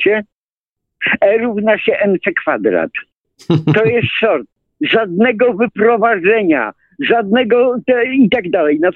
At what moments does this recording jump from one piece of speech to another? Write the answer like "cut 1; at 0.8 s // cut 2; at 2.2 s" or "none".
none